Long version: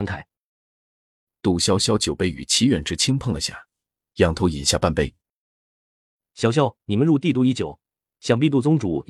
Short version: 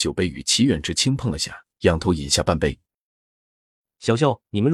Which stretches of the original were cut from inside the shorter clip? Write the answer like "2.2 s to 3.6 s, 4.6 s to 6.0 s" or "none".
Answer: 3.7 s to 4.1 s